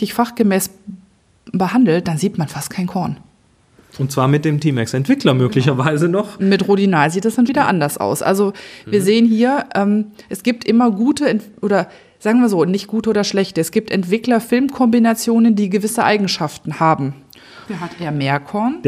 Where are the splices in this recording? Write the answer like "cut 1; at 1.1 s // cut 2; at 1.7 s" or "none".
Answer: cut 1; at 7.5 s // cut 2; at 17.7 s